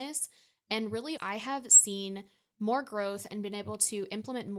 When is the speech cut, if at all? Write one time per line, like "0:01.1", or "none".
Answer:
0:01.2